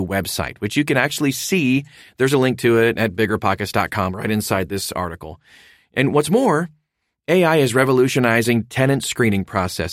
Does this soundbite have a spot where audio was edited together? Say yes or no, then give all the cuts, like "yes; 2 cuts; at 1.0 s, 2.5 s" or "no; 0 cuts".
no; 0 cuts